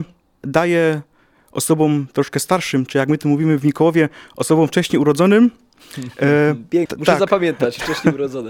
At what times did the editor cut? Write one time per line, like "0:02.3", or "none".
0:06.9